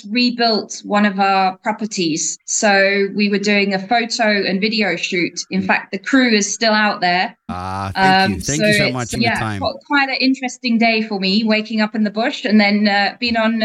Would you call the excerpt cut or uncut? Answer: cut